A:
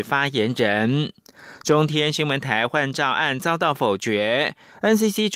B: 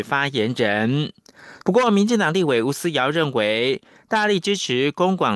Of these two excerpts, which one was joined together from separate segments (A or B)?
B